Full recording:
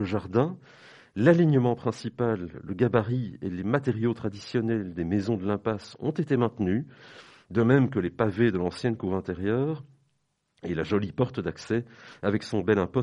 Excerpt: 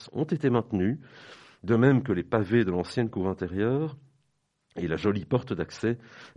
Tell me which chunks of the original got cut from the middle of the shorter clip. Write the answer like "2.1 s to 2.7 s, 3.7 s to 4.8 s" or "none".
none